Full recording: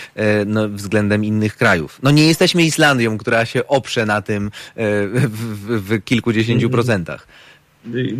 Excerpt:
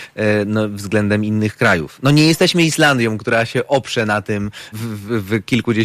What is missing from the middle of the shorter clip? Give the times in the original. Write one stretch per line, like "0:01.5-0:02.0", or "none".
0:04.7-0:05.3